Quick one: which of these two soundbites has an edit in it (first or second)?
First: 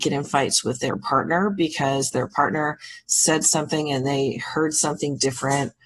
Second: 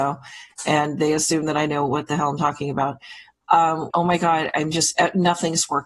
second